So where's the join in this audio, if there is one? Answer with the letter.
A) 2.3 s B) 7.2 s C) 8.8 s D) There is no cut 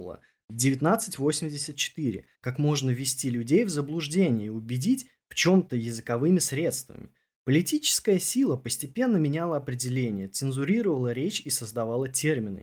A